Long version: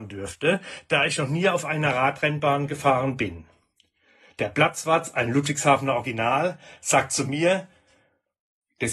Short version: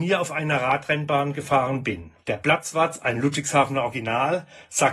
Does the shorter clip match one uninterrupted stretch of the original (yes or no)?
no